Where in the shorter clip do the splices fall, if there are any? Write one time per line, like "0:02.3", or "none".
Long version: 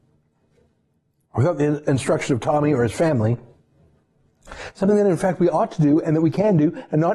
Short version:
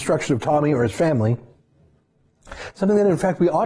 none